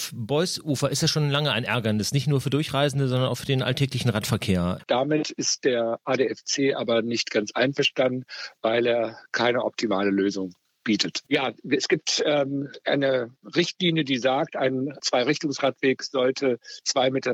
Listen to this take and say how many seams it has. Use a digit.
3